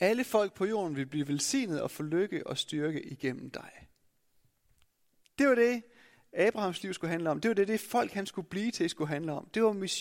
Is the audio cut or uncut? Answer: uncut